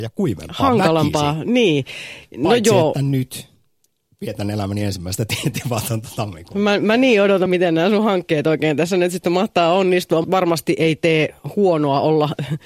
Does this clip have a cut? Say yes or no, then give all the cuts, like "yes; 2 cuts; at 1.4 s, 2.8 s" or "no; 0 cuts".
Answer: yes; 2 cuts; at 7.5 s, 10.2 s